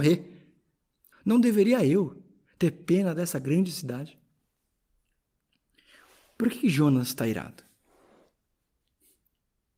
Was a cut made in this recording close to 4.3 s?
no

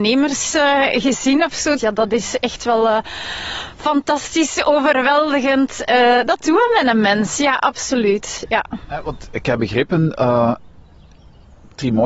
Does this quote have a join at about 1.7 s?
yes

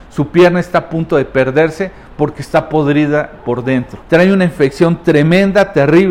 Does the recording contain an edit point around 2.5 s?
no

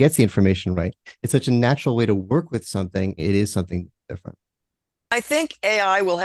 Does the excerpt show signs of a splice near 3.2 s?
yes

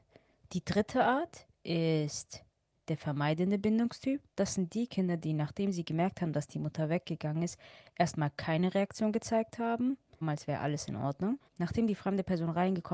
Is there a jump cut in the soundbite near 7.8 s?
no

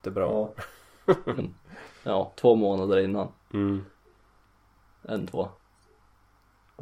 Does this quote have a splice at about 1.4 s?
yes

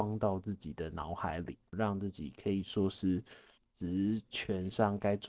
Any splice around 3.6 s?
yes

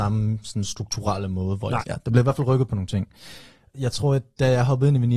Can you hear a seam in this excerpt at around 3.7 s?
no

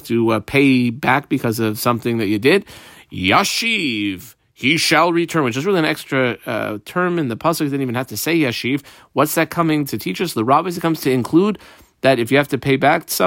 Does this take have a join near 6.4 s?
no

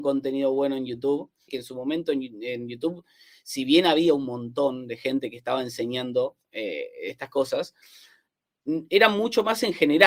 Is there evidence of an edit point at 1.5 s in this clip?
yes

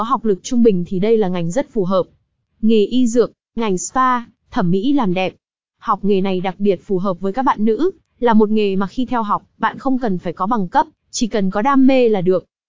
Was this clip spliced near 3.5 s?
yes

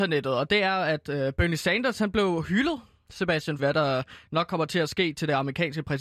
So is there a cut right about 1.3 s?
no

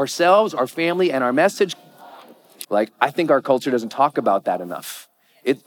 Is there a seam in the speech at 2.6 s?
yes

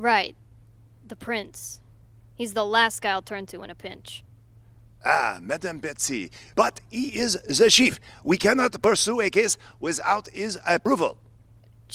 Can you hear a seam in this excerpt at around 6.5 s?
yes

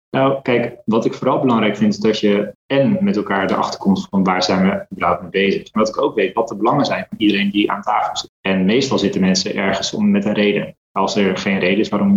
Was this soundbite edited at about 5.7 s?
yes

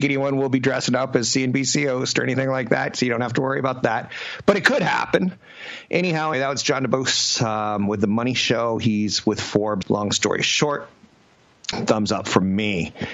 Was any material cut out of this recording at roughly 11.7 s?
yes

